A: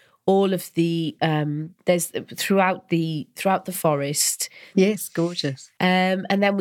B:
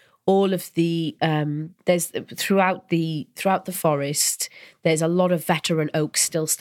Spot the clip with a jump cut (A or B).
A